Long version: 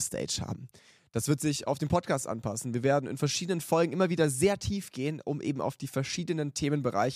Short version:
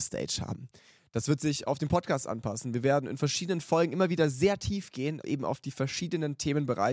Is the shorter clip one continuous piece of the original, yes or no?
no